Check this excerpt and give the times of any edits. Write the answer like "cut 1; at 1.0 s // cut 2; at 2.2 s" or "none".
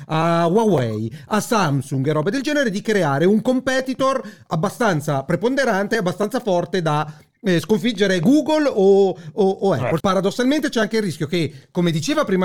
cut 1; at 10.0 s